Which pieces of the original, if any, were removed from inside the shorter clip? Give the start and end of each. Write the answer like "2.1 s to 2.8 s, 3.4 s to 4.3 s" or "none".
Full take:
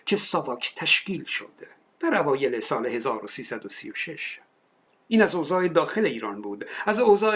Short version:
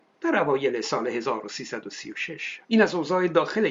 4.4 s to 5.0 s